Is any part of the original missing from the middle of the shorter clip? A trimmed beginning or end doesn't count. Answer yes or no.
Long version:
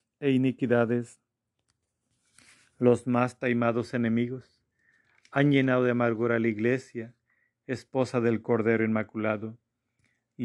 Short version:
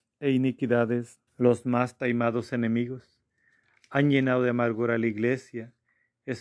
yes